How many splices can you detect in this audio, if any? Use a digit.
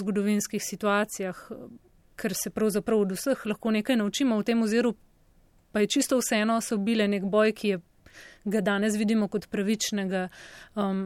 0